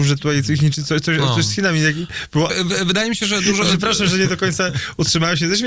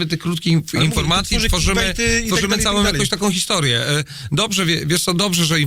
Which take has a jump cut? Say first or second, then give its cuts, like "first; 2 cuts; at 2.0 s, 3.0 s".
first; 1 cut; at 2.5 s